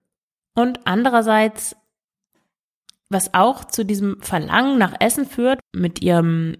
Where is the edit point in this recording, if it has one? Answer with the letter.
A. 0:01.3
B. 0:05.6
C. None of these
B